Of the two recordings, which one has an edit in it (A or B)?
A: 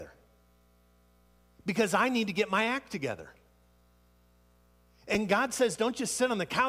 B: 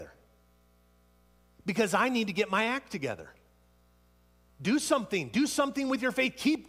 B